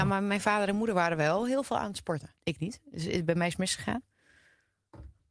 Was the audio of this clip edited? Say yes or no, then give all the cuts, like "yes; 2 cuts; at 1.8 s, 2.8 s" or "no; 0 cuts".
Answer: yes; 1 cut; at 2.3 s